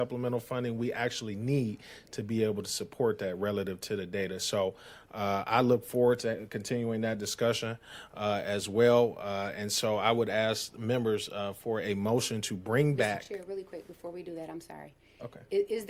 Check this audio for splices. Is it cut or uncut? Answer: uncut